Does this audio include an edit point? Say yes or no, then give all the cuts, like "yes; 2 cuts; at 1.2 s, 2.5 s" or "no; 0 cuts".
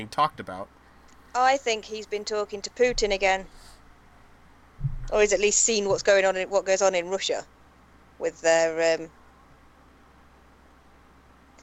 no; 0 cuts